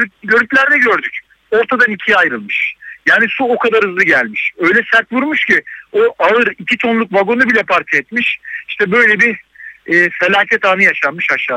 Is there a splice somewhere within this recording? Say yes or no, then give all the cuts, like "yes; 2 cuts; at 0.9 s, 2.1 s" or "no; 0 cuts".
yes; 1 cut; at 7.7 s